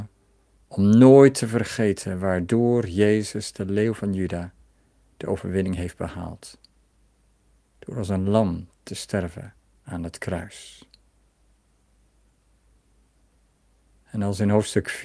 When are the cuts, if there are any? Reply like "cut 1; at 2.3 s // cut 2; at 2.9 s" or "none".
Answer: none